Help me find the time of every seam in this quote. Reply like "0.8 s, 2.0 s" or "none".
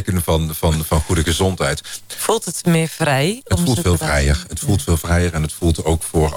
2.1 s

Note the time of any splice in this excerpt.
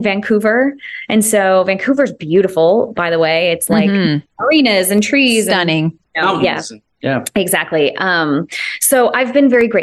none

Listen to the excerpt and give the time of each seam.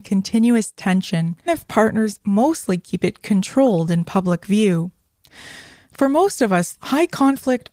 1.5 s, 6.7 s

